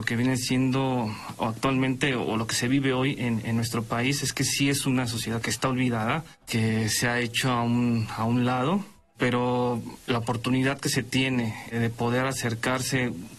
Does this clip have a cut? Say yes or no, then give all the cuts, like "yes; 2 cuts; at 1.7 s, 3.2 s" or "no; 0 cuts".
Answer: no; 0 cuts